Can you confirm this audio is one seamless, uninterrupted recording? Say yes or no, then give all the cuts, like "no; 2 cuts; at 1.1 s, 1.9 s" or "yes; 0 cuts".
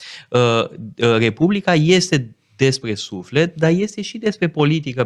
yes; 0 cuts